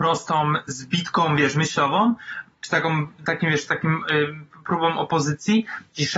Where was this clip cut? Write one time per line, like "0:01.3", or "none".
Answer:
none